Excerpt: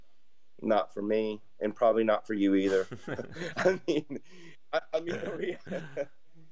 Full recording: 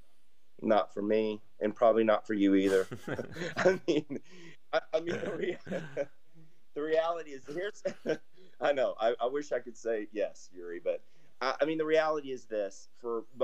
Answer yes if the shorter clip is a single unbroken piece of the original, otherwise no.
yes